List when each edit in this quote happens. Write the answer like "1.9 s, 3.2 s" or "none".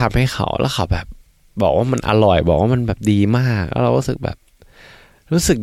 none